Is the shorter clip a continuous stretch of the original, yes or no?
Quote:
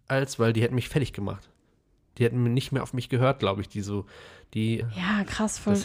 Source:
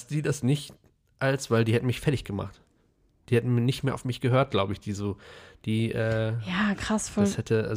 no